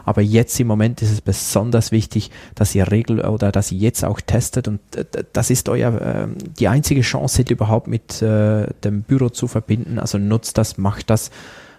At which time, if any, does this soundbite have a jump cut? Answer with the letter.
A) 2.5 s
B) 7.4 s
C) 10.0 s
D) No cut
B